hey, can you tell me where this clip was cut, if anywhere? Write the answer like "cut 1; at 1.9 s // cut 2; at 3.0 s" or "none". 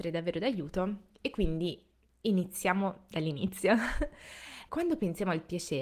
cut 1; at 4.7 s